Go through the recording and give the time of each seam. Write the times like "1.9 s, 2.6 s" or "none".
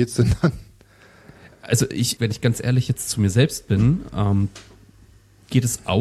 2.2 s